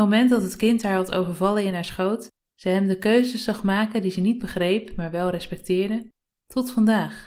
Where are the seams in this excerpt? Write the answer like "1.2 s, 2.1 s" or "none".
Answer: 2.5 s